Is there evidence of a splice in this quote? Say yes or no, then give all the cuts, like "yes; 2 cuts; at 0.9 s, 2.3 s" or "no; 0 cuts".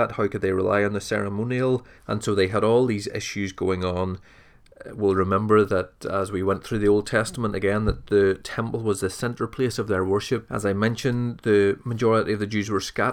yes; 2 cuts; at 2.0 s, 10.5 s